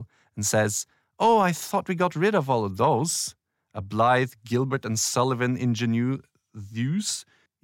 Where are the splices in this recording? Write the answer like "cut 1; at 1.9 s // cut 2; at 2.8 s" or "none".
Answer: none